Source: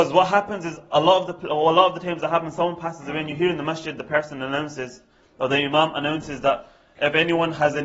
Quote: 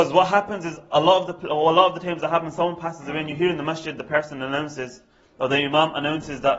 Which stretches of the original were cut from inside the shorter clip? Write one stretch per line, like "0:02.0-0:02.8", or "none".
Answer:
none